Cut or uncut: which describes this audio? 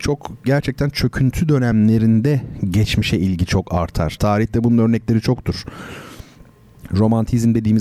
cut